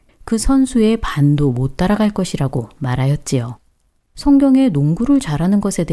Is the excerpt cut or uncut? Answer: cut